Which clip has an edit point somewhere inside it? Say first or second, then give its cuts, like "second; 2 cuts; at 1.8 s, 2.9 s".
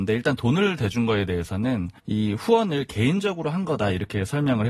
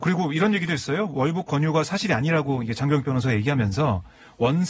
first; 1 cut; at 2.0 s